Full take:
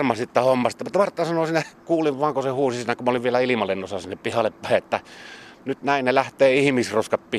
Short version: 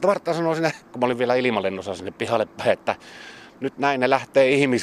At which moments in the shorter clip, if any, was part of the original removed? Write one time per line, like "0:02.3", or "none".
0:00.9